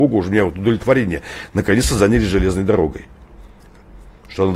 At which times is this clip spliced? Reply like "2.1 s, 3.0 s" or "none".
none

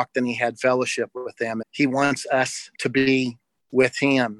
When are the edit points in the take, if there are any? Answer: 1.6 s, 2.7 s

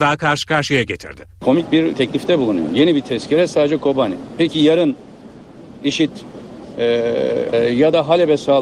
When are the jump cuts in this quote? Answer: 7.5 s

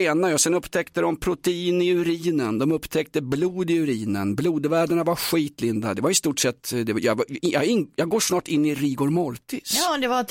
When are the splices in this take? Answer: none

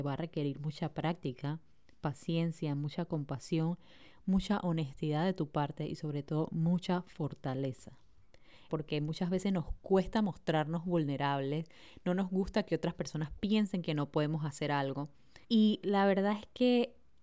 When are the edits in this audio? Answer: 8.7 s, 15.4 s

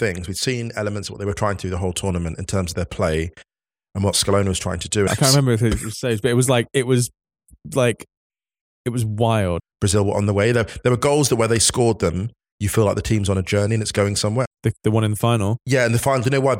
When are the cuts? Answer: 5.1 s, 9.6 s, 14.4 s

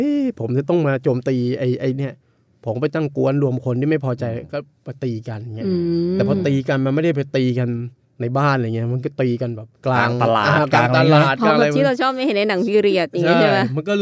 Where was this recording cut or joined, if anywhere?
9.8 s

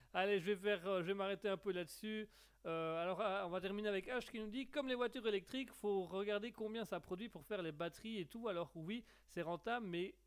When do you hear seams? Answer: none

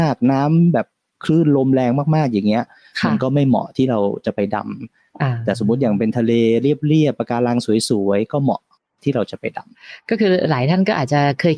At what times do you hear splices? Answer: none

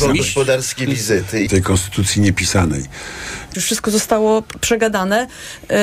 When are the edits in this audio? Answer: 1.5 s, 3.5 s

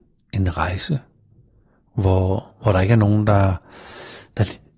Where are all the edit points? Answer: none

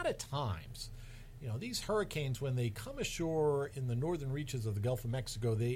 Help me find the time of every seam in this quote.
none

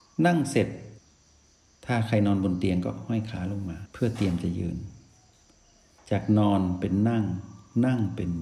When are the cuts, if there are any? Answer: none

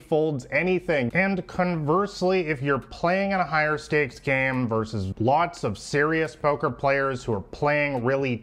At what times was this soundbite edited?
1.1 s

